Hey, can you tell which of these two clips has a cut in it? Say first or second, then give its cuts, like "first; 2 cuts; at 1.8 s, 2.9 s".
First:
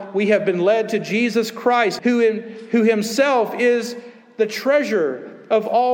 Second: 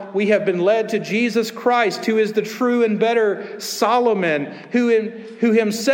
first; 1 cut; at 2.0 s